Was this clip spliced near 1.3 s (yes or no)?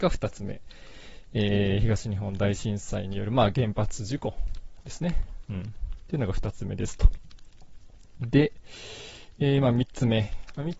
no